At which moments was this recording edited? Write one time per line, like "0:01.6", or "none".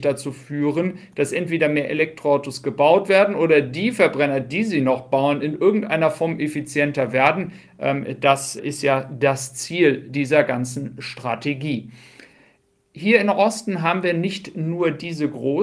0:08.6